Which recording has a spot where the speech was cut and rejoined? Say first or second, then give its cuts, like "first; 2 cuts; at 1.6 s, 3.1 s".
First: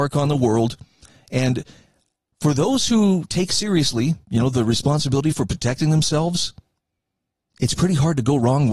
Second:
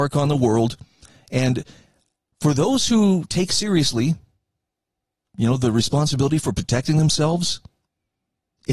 first; 1 cut; at 4.2 s